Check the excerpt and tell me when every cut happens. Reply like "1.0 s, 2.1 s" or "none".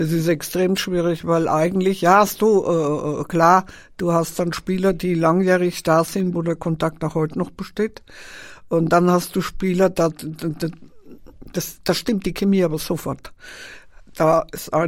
6.3 s, 10.1 s, 11.8 s